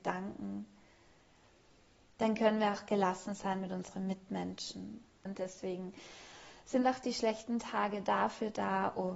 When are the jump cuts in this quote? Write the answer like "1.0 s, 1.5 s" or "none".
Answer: 5.3 s